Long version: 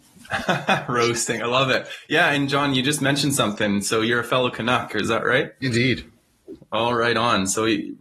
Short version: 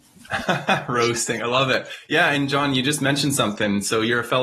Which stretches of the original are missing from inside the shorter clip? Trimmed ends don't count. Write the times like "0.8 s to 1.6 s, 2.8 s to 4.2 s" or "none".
none